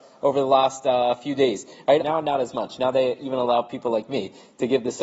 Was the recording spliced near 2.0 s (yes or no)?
yes